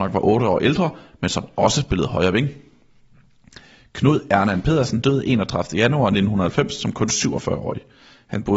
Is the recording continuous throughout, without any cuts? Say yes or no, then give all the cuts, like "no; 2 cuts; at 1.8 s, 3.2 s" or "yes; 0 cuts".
no; 1 cut; at 5.0 s